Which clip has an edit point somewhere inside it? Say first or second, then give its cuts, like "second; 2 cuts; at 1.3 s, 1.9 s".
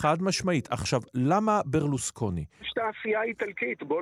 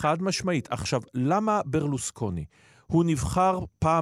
first; 1 cut; at 2.6 s